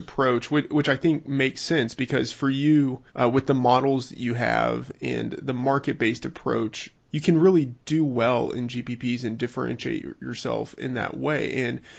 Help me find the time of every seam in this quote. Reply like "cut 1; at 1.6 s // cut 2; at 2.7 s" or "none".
cut 1; at 3.1 s // cut 2; at 6.9 s